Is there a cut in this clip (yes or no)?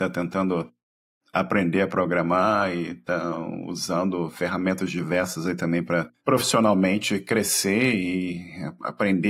no